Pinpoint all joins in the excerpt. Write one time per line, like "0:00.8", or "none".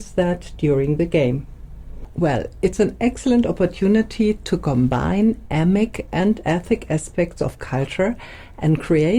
0:02.1